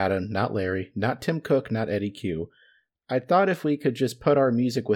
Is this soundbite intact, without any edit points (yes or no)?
yes